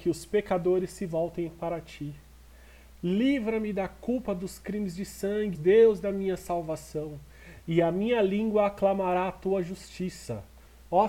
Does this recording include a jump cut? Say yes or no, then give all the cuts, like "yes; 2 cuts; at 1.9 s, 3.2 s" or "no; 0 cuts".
yes; 1 cut; at 5.5 s